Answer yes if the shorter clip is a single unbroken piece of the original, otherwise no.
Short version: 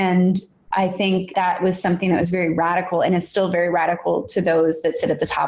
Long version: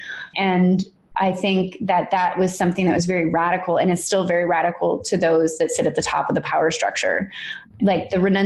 no